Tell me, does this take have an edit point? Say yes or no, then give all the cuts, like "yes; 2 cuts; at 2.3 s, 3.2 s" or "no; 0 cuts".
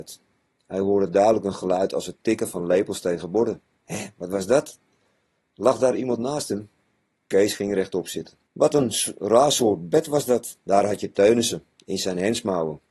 yes; 2 cuts; at 8.5 s, 10.6 s